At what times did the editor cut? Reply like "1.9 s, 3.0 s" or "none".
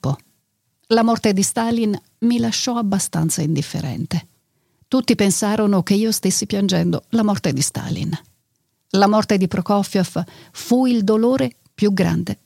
4.8 s